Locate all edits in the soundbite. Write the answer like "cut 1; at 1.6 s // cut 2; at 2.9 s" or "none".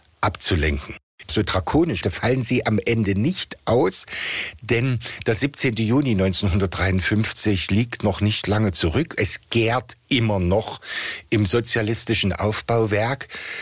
cut 1; at 2.0 s

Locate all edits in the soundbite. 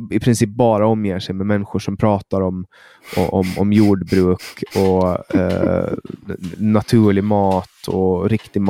none

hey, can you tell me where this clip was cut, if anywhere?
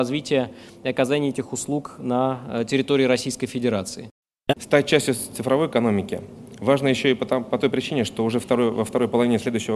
cut 1; at 4.5 s

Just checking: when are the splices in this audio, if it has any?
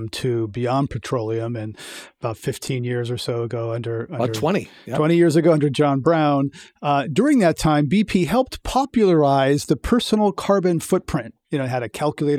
none

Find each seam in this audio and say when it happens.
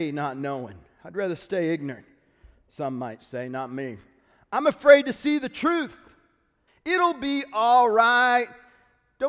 cut 1; at 6.7 s

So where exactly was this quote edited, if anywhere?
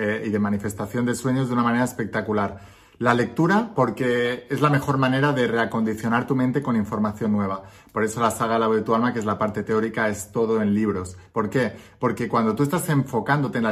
cut 1; at 11.3 s

